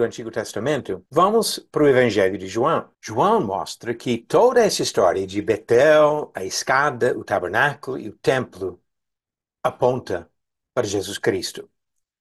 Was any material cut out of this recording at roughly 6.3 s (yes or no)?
no